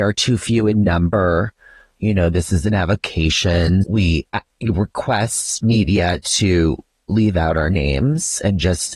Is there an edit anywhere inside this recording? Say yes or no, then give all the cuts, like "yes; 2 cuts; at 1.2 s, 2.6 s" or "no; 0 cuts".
yes; 1 cut; at 3.8 s